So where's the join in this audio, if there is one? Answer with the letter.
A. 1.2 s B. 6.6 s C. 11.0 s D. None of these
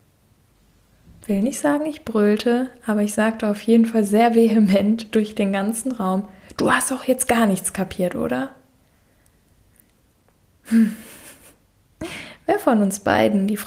D